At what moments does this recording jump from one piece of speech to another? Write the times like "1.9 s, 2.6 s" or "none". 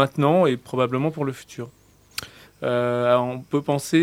2.5 s

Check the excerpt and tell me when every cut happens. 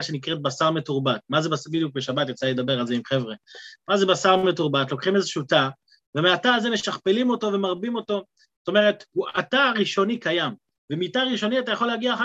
none

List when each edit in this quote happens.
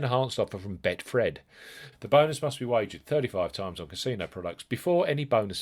1.9 s

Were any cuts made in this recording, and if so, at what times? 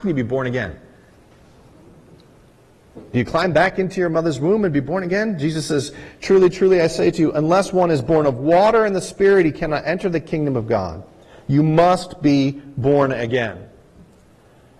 none

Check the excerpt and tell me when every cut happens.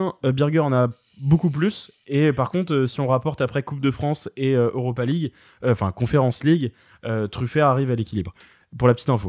none

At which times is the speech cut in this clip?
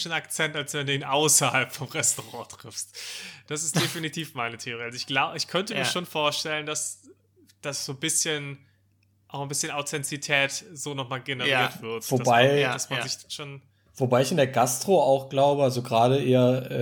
none

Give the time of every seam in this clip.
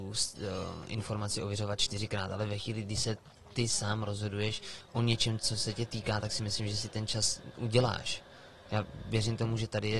none

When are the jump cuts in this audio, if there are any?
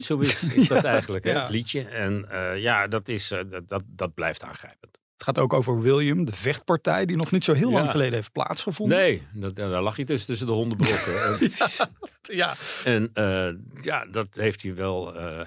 11.3 s, 12.8 s

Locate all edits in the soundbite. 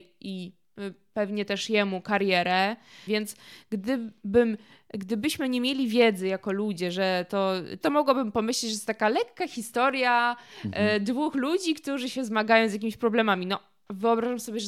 3.1 s, 7.8 s

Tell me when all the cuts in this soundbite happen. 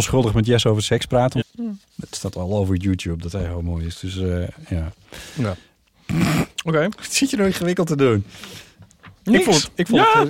1.4 s

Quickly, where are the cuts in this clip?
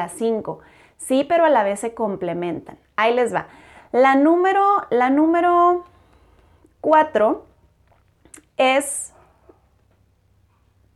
none

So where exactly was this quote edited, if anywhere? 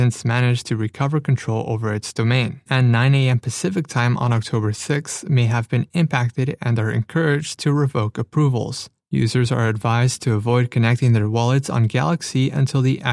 2.7 s

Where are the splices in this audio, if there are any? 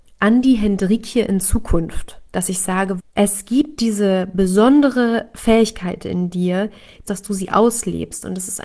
3.0 s, 7.0 s

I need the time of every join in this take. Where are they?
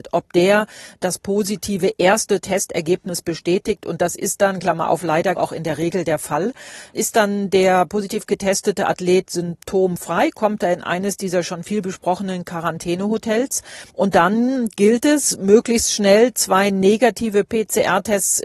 5.4 s, 13.9 s

